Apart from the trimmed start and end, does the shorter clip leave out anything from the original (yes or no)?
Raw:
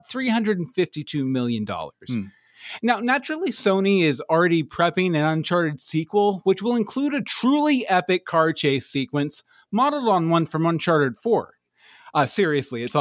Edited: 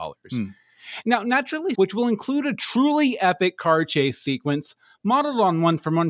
yes